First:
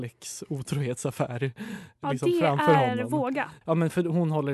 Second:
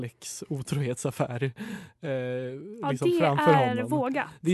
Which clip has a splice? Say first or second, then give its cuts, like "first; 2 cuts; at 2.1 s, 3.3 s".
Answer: first; 2 cuts; at 2.0 s, 3.6 s